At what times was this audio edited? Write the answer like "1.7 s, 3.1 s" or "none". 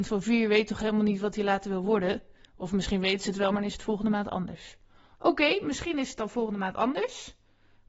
none